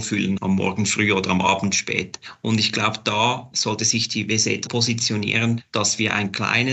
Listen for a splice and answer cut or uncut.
cut